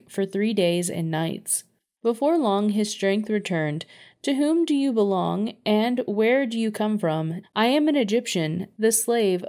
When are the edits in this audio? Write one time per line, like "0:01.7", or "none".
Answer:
0:07.4

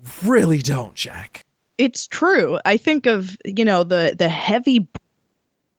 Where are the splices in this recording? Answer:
none

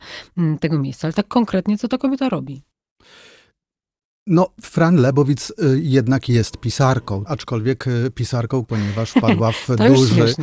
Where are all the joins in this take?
0:07.3
0:08.6

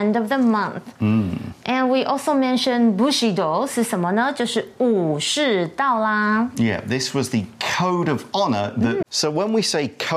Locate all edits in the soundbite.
0:09.0

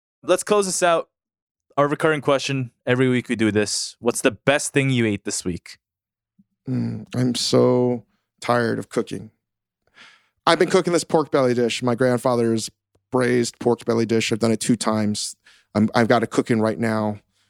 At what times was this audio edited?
none

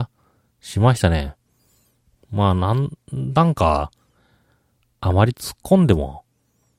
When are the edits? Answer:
none

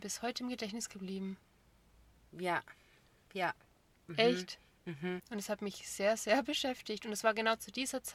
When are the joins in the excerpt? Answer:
0:02.3
0:04.1
0:05.2

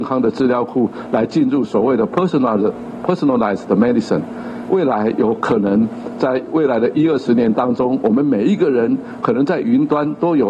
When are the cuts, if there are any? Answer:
none

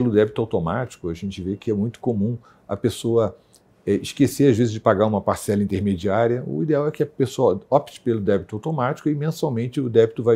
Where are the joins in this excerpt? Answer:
none

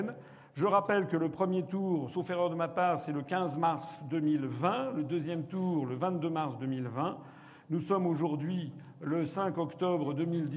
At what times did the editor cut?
none

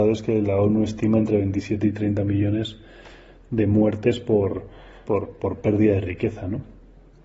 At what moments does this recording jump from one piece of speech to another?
0:05.1

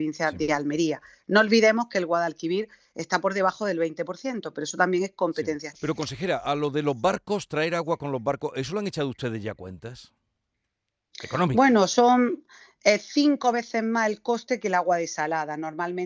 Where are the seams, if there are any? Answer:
0:05.7

